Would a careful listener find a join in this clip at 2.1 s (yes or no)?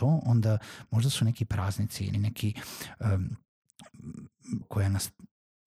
yes